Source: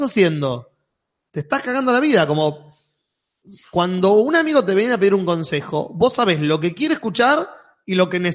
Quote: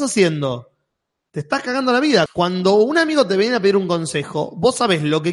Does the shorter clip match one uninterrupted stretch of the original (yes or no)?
no